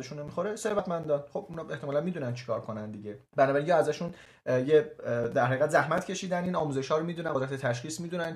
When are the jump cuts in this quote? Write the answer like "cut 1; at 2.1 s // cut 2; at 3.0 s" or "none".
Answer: cut 1; at 3.3 s

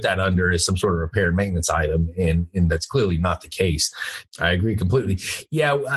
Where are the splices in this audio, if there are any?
cut 1; at 4.2 s

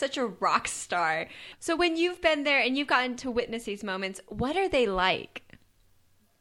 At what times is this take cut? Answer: none

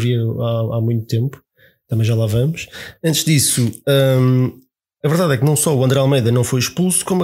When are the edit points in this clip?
none

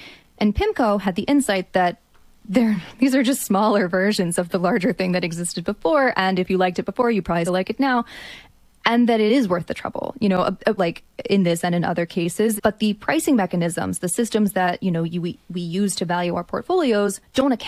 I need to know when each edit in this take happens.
cut 1; at 7.5 s // cut 2; at 10.8 s // cut 3; at 12.6 s

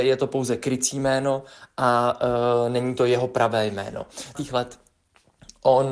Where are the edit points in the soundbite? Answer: cut 1; at 4.3 s

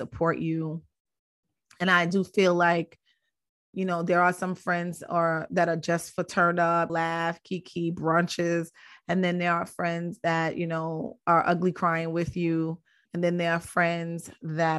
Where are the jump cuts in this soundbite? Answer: cut 1; at 6.9 s // cut 2; at 13.1 s

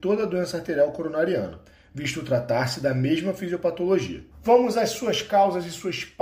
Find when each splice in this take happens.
cut 1; at 4.3 s

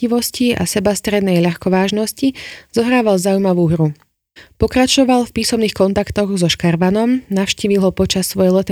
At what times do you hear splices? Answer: none

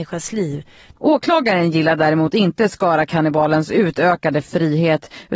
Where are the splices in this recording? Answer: cut 1; at 1.0 s

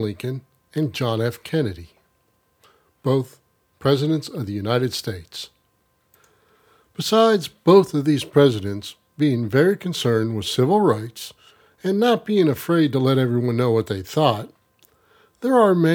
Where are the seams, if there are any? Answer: none

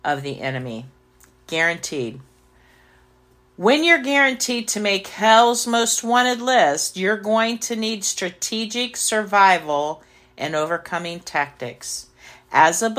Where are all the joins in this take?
none

